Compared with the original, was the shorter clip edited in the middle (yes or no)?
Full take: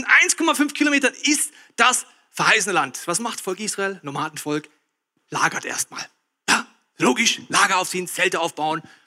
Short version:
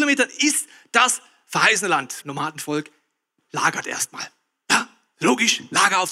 yes